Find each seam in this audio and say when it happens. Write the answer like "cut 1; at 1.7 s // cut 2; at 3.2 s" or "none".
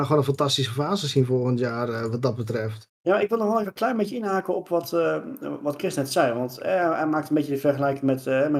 cut 1; at 3.6 s